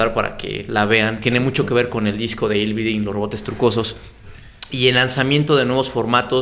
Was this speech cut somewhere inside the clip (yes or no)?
no